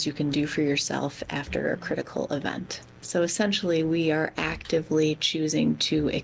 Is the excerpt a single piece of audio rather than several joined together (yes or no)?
no